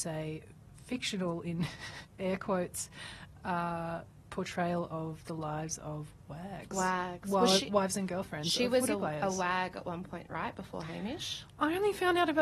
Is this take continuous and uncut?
yes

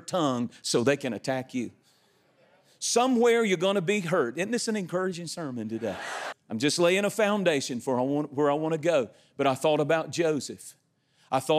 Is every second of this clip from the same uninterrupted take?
no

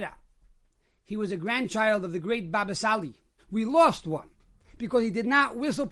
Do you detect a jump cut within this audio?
yes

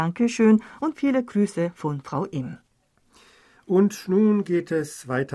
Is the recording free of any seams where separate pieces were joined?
yes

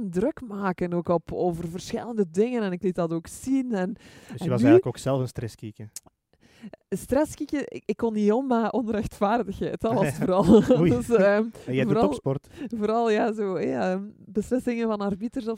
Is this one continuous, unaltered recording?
yes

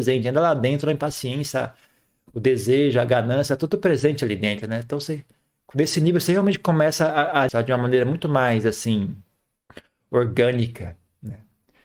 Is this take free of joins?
no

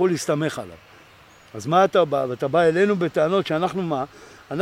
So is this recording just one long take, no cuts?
yes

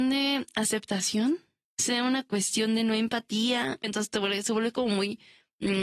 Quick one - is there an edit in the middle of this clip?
yes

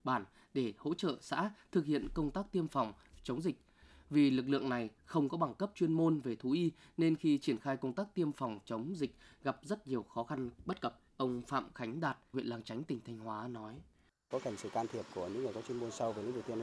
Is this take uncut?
no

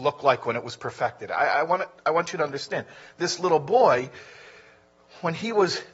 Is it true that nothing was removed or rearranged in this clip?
yes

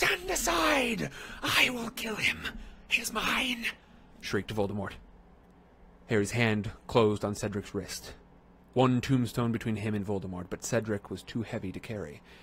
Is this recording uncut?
yes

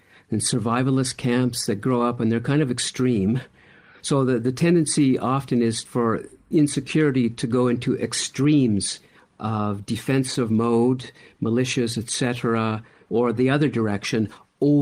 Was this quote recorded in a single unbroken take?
yes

